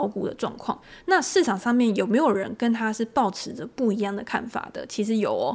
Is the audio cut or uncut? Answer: uncut